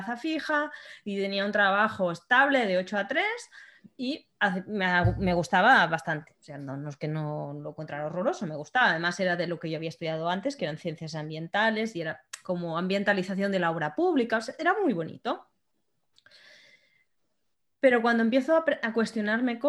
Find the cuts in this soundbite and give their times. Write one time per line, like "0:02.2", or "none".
none